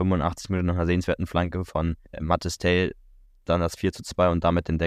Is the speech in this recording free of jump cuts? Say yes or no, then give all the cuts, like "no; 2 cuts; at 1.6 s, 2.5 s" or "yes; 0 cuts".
no; 1 cut; at 2.0 s